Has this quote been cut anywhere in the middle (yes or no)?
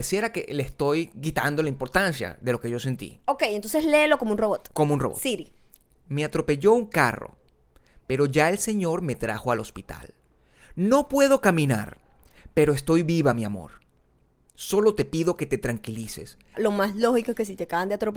yes